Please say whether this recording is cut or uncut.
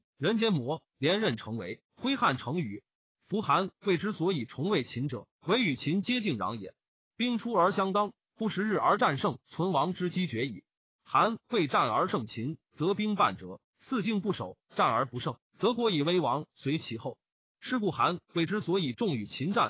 uncut